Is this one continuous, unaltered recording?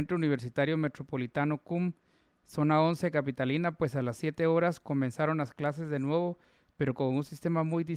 yes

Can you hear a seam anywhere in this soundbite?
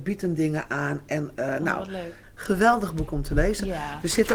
no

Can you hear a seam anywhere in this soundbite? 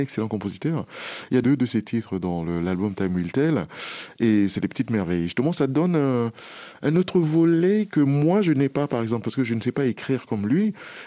no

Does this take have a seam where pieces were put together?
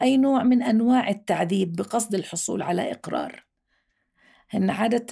no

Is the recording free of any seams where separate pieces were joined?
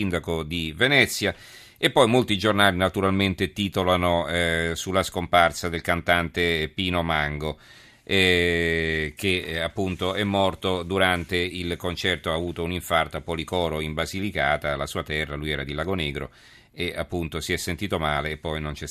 yes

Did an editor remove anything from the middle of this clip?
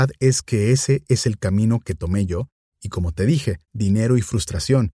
yes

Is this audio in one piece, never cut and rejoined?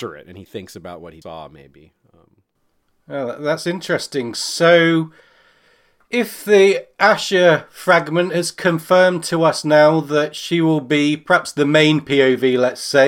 no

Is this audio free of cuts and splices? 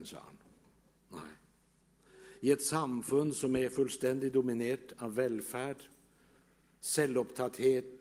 no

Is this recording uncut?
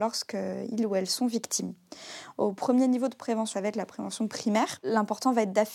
no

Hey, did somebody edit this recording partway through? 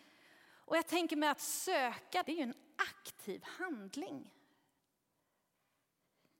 yes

